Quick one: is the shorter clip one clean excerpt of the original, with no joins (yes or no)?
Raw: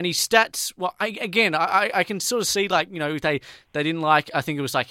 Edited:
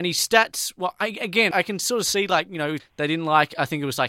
no